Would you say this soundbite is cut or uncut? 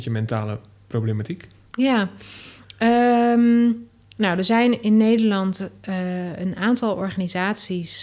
uncut